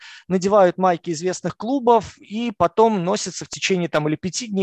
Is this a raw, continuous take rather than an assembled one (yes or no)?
yes